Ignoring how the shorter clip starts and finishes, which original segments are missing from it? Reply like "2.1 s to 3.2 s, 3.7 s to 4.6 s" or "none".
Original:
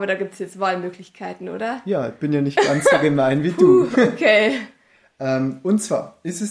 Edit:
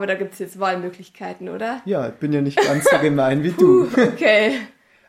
none